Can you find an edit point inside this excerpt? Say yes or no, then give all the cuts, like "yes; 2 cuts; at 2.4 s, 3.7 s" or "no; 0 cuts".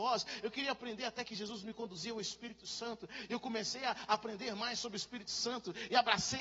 no; 0 cuts